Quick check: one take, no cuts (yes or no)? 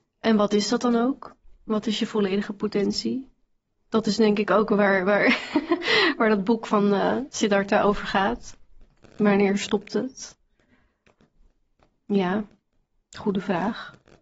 yes